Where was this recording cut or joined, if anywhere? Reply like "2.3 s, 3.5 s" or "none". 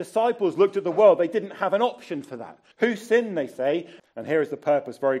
2.7 s, 4.0 s